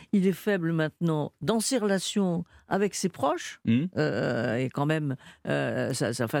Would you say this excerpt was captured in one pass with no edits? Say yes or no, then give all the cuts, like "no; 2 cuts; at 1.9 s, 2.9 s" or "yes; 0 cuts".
yes; 0 cuts